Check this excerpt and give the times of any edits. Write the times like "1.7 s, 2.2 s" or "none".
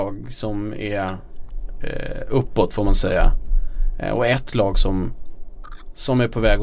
none